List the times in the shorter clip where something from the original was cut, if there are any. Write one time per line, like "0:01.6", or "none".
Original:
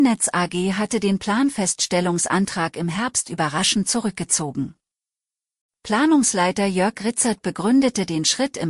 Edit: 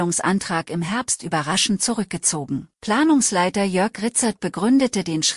0:02.7